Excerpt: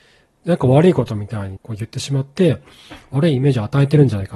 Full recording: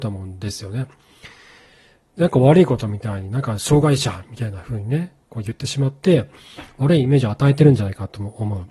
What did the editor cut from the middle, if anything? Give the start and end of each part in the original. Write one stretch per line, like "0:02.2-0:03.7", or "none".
0:03.3-0:05.2